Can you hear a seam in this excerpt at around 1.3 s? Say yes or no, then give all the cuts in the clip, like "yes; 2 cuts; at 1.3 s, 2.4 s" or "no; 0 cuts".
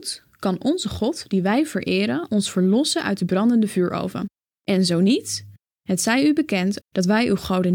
no; 2 cuts; at 4.5 s, 6.8 s